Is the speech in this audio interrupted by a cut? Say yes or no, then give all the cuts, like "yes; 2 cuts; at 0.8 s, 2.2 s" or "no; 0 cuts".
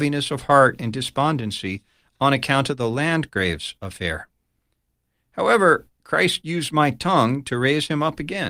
no; 0 cuts